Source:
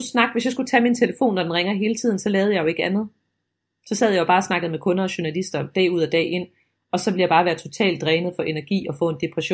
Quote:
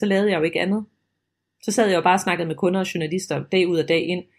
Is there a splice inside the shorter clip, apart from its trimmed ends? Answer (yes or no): no